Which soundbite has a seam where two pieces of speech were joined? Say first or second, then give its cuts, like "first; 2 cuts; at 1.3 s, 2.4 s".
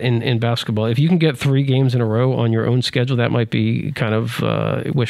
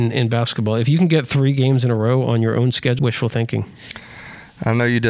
second; 1 cut; at 3.0 s